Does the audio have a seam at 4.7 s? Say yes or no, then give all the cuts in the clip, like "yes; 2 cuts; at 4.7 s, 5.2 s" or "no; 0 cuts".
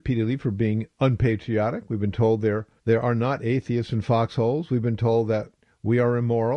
no; 1 cut; at 2.8 s